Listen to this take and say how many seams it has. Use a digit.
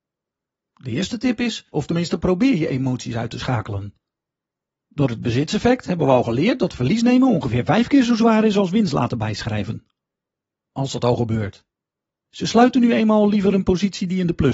3